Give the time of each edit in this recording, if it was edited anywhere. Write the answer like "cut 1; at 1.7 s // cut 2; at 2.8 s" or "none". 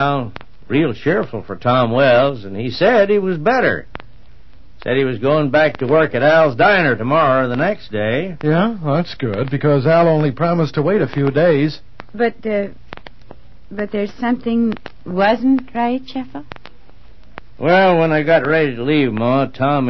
none

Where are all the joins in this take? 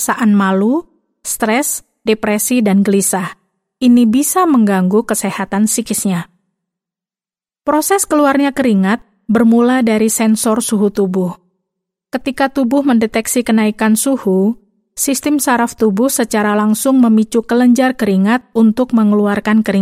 none

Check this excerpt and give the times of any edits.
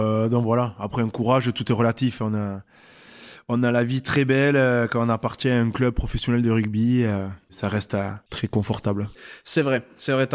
none

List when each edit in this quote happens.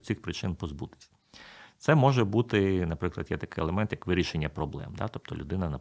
none

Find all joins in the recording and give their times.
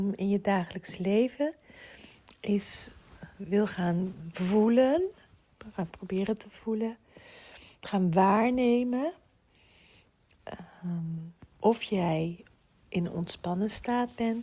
cut 1; at 11.5 s

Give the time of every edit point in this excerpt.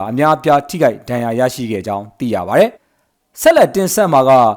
cut 1; at 2.7 s

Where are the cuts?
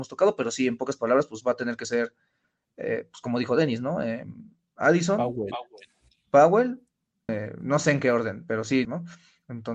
cut 1; at 7.3 s // cut 2; at 8.8 s

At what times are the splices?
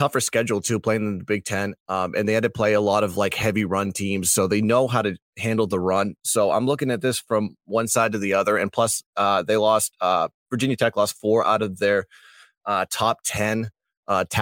none

